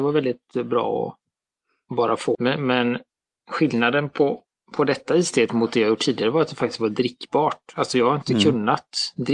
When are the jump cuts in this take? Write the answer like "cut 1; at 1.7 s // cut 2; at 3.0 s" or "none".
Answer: cut 1; at 2.3 s

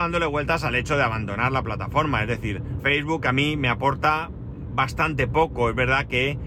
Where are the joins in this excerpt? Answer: cut 1; at 2.8 s

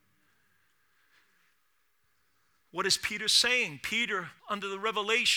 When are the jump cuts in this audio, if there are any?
cut 1; at 4.4 s

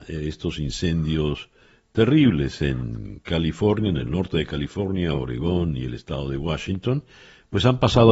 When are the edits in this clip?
none

